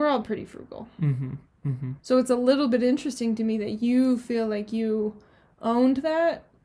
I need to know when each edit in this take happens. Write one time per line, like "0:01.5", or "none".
0:02.0